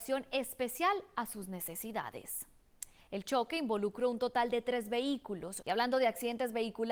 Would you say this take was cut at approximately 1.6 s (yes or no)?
no